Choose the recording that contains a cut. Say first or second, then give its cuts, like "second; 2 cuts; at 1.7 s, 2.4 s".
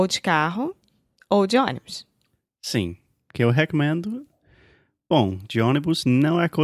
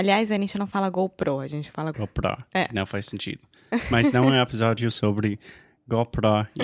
second; 1 cut; at 1.9 s